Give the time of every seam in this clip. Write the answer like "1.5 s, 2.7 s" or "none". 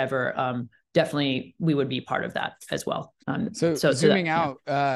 3.2 s